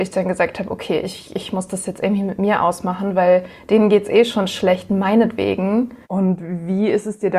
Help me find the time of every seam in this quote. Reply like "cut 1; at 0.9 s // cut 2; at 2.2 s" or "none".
cut 1; at 6.0 s